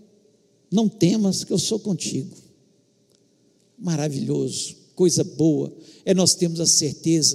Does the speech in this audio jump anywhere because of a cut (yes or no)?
no